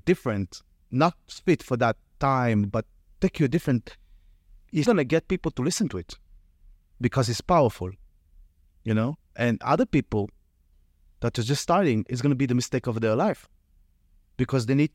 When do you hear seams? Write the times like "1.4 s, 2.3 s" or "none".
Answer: 4.8 s